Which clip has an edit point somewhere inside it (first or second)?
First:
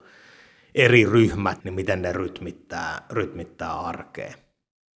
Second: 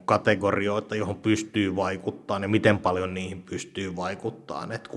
first